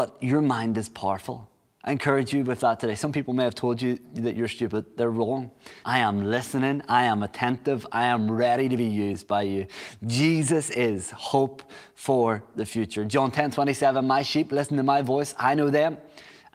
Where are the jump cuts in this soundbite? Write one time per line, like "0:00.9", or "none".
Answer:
0:05.8